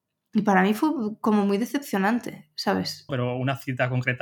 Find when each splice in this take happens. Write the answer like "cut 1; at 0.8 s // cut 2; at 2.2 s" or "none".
cut 1; at 3.1 s